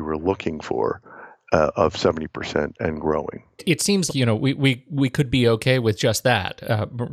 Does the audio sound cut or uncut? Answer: cut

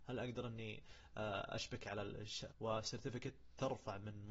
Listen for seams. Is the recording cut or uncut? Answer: cut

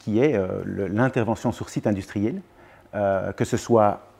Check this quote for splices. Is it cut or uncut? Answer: uncut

